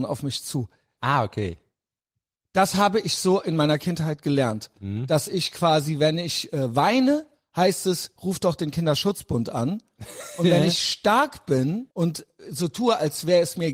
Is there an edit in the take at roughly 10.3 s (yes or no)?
no